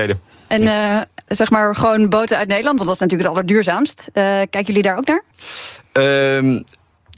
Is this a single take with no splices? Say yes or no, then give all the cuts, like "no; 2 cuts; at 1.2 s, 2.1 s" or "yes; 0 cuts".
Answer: no; 1 cut; at 1.3 s